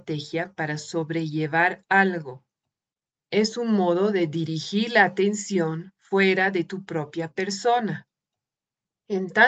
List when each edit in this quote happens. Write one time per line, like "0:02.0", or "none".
none